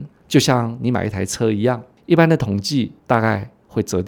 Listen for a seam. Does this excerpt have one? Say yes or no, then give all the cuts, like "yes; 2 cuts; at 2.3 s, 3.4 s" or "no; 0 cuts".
yes; 1 cut; at 3.0 s